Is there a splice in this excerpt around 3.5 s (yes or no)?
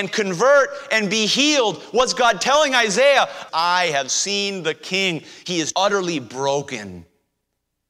yes